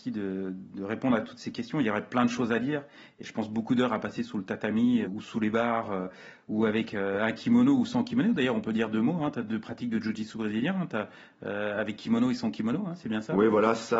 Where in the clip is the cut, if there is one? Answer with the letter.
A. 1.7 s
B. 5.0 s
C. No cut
B